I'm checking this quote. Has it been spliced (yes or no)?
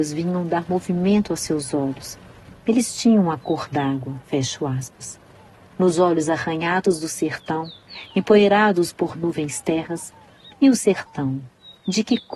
yes